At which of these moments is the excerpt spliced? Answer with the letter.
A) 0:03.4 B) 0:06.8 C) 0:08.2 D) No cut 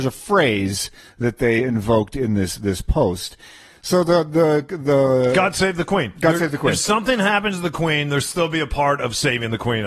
D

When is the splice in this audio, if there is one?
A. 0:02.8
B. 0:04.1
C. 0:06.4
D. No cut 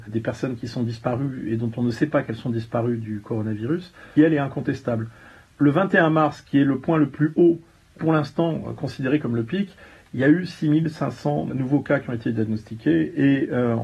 B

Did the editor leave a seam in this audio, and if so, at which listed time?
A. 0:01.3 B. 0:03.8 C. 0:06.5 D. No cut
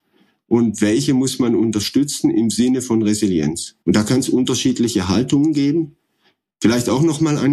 B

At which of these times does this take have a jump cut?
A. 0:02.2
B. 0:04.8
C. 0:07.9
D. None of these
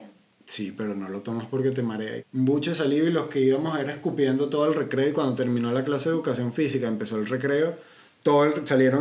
A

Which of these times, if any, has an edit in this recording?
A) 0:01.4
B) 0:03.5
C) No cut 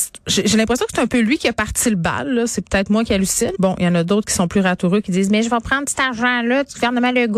B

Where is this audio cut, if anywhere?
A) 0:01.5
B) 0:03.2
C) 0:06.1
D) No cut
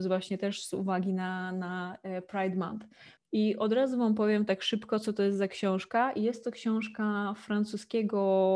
B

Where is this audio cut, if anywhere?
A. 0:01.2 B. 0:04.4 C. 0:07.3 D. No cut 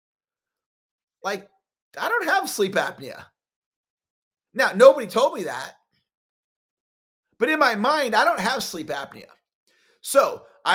A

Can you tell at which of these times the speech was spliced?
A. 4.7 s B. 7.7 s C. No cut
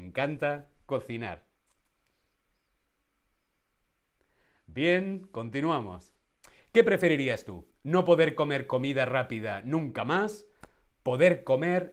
C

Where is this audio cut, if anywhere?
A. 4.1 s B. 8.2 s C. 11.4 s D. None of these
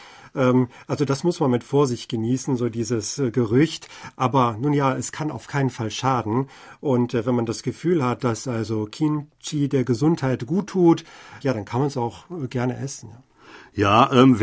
C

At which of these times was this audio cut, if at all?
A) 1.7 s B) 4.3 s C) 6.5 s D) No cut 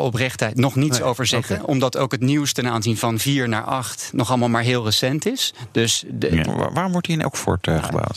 C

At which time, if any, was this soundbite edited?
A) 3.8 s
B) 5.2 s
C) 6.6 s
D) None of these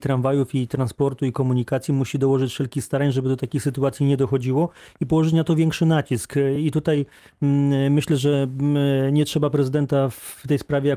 D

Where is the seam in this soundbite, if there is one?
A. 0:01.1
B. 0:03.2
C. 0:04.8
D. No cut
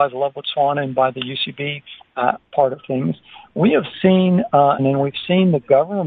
C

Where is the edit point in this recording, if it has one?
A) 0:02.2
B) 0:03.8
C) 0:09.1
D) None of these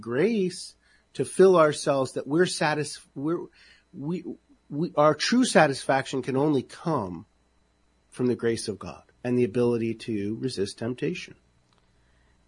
C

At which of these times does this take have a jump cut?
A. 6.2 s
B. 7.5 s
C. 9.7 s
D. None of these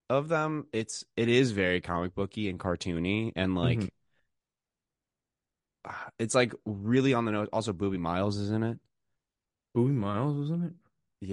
D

